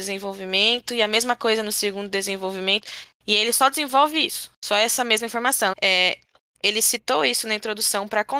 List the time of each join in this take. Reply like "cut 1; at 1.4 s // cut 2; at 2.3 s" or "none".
cut 1; at 5.7 s